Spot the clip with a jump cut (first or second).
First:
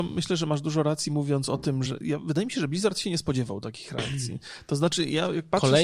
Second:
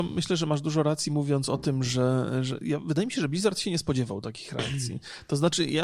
first